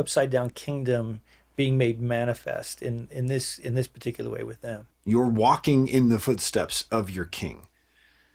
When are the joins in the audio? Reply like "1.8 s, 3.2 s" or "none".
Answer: 4.9 s